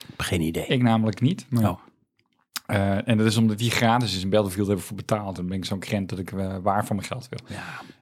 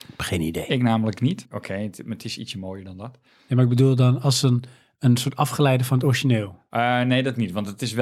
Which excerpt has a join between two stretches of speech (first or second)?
second